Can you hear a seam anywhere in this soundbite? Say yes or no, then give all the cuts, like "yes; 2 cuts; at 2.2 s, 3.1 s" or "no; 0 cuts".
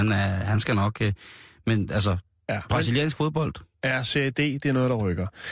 no; 0 cuts